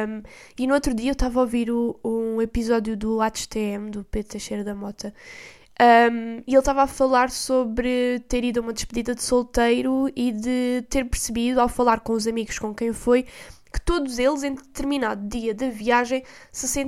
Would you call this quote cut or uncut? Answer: uncut